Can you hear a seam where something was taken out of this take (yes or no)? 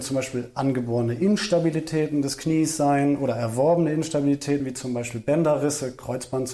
no